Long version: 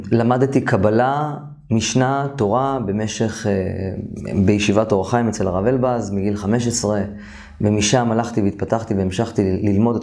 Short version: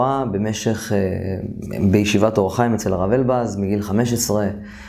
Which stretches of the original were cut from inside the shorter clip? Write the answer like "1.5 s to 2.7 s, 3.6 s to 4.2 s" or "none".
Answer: none